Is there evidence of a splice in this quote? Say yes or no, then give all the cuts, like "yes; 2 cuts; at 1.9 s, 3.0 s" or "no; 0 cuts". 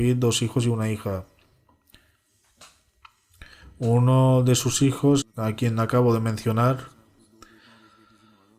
yes; 1 cut; at 5.2 s